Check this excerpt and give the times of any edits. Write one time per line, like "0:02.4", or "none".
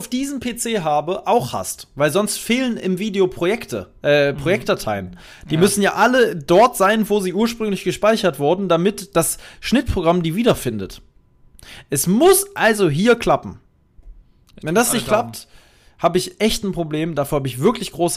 none